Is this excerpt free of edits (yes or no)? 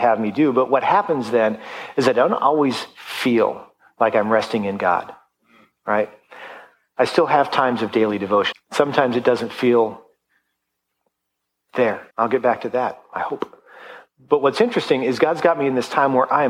no